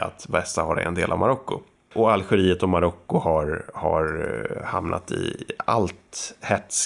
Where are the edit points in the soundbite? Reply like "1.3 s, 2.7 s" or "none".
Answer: 1.9 s